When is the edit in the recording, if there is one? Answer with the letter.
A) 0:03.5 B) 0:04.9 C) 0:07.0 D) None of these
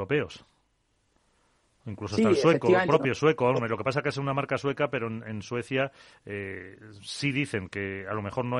D